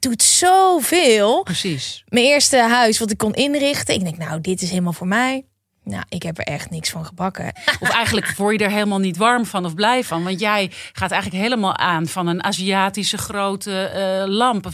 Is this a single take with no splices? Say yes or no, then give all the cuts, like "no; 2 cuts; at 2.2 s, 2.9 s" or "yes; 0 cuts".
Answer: no; 1 cut; at 7.6 s